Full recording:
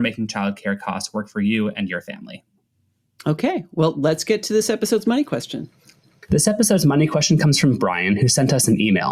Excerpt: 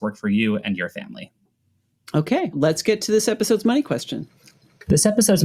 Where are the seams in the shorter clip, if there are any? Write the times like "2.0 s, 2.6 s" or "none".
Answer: 2.5 s